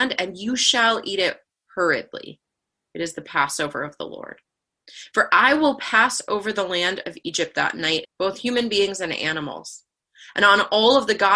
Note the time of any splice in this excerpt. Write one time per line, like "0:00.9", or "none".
0:08.0